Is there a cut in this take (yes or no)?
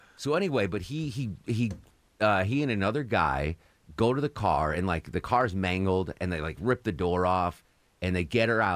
no